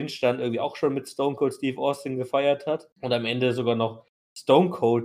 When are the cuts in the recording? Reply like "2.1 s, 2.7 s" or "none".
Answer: 2.9 s